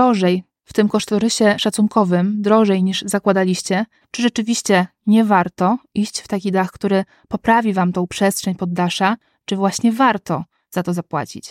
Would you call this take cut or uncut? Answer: cut